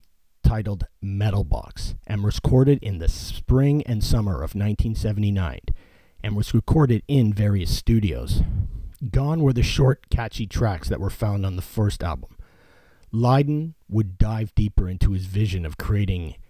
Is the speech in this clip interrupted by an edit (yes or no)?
no